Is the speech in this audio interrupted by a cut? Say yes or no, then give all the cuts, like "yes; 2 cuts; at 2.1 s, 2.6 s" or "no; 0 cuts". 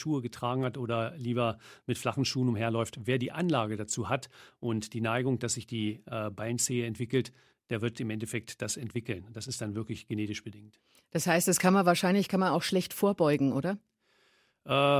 no; 0 cuts